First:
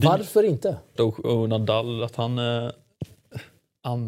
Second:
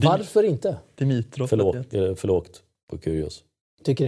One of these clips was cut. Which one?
first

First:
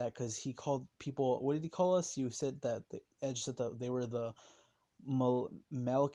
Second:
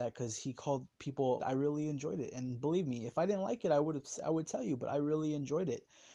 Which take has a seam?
second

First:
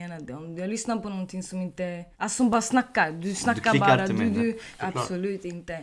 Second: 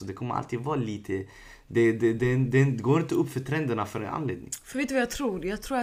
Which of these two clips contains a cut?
first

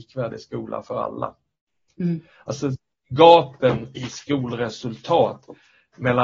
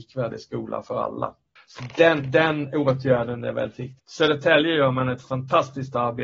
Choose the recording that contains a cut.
second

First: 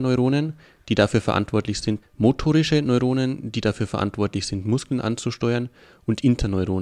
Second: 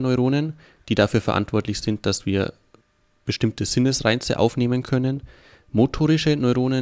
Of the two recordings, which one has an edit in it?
first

